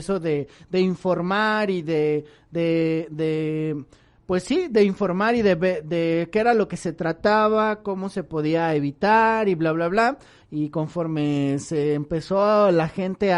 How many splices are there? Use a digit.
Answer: 1